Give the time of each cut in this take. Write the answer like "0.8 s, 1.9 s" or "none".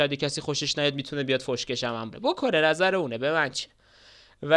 2.1 s